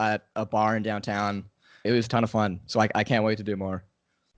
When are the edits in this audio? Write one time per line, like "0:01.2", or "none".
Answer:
0:01.9